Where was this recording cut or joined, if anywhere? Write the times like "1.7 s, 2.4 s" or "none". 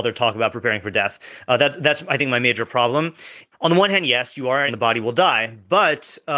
3.5 s, 4.7 s